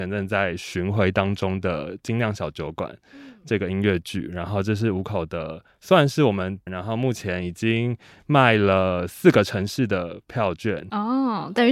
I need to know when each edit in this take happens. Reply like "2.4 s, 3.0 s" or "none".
6.7 s